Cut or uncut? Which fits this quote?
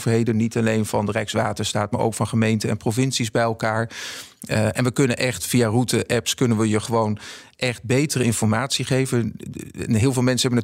uncut